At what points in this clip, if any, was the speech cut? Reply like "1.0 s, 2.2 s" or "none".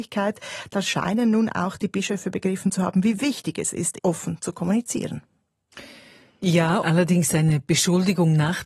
4.0 s, 6.8 s